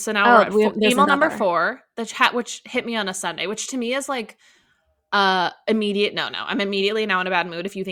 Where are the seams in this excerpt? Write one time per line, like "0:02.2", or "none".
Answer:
none

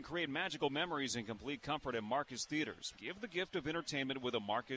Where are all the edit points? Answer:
0:02.9

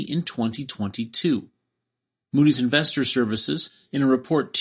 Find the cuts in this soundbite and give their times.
none

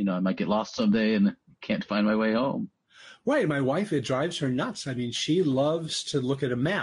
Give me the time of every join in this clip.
none

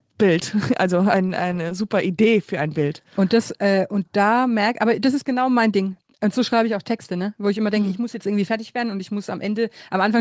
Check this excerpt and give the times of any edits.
none

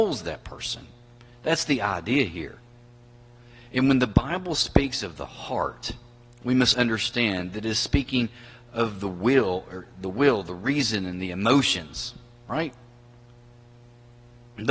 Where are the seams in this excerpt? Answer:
0:06.7

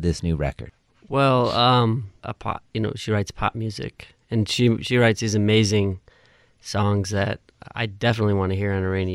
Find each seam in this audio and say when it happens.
0:02.2

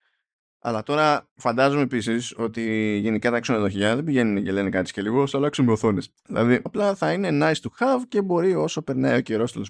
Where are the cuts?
0:06.7

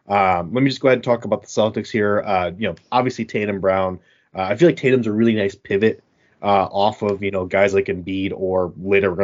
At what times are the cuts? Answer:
none

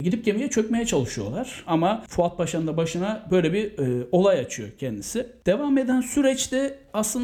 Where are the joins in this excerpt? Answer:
0:01.7

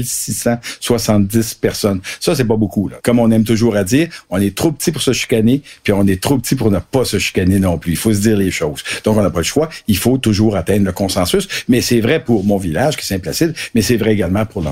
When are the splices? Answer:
0:03.0

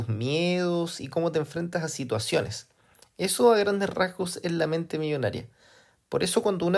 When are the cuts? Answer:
none

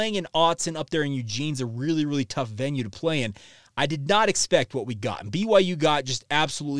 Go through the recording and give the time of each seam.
none

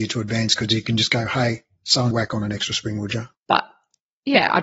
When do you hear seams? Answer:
0:02.1
0:03.3

